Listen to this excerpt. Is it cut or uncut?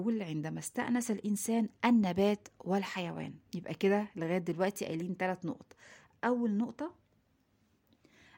cut